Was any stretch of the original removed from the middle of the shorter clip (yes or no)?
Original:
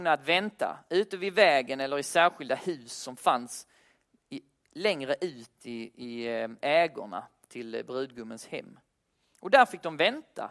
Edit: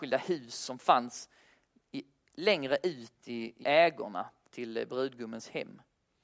yes